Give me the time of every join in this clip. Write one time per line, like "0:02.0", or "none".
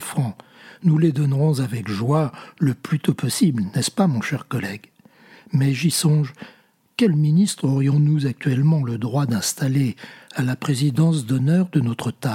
none